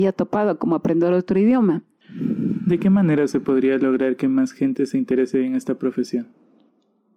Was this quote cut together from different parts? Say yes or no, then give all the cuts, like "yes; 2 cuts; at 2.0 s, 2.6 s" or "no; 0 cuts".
yes; 1 cut; at 2.0 s